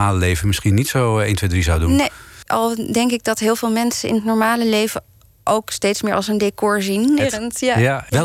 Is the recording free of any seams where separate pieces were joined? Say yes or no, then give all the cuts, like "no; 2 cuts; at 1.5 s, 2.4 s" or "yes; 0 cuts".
no; 2 cuts; at 2.5 s, 7.2 s